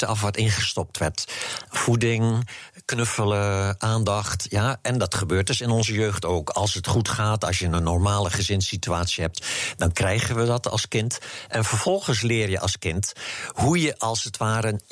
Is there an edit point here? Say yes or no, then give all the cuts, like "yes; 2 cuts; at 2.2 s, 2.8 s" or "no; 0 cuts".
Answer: no; 0 cuts